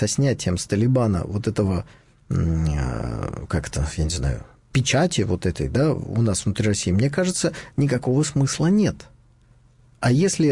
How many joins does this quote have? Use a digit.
0